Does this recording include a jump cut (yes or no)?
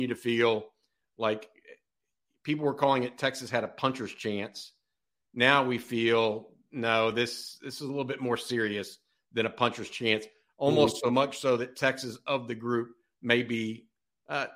no